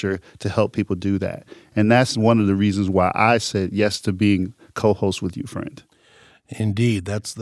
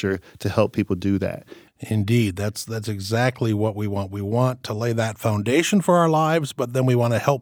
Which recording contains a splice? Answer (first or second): second